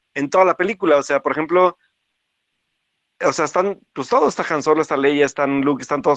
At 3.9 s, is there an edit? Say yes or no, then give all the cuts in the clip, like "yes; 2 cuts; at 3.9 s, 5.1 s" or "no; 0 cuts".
no; 0 cuts